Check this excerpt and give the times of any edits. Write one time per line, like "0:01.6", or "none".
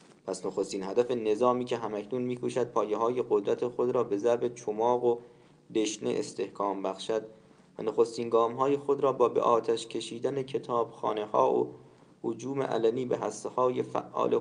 none